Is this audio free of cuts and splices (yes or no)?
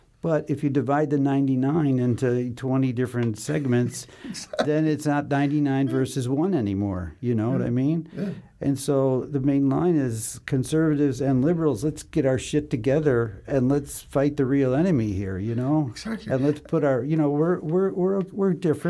yes